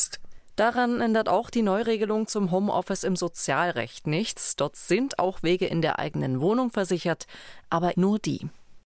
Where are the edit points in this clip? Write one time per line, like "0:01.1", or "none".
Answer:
0:07.9

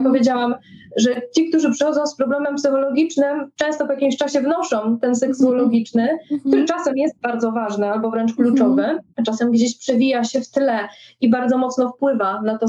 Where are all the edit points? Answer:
0:09.1

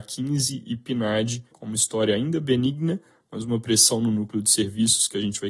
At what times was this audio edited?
0:01.5

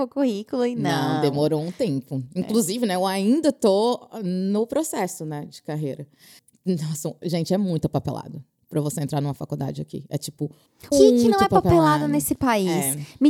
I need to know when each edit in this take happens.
0:10.9

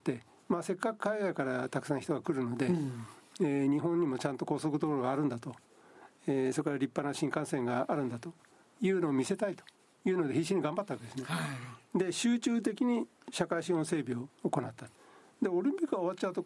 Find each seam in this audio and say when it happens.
none

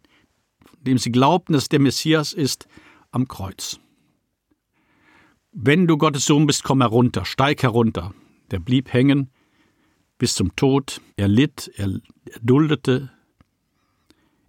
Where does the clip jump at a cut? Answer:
0:11.1

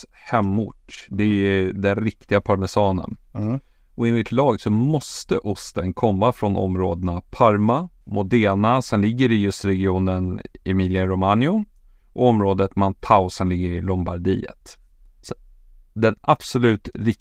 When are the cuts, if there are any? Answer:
0:08.0

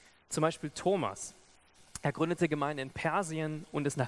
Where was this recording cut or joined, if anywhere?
none

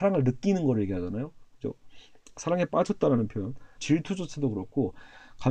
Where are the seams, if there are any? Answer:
0:03.8

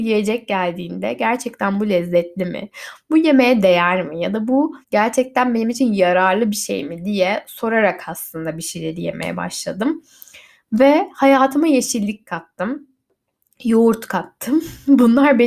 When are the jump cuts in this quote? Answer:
0:04.8

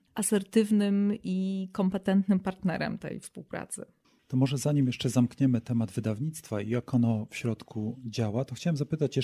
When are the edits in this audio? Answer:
none

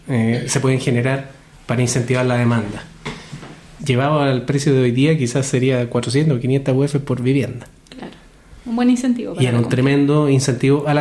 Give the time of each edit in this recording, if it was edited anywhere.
0:03.8

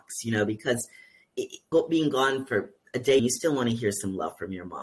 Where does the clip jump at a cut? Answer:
0:01.7
0:03.2

